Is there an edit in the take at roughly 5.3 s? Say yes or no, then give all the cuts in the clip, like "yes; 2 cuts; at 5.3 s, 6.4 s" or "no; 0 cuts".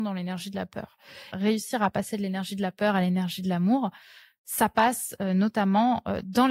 no; 1 cut; at 1.3 s